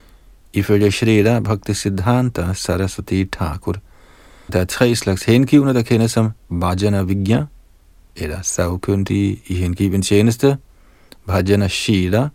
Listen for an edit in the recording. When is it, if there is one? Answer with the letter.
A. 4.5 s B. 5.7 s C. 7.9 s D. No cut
A